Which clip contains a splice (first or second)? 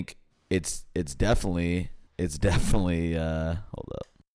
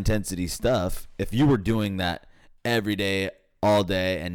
first